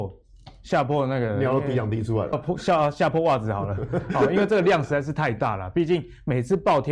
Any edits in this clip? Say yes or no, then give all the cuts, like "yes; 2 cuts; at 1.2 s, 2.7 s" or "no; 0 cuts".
yes; 1 cut; at 2.3 s